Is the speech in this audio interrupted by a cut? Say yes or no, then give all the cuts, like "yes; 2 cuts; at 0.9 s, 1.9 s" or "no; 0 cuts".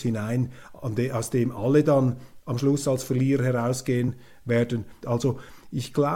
yes; 1 cut; at 5.0 s